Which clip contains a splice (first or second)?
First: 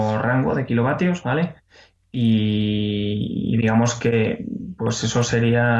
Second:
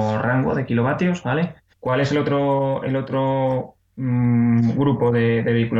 second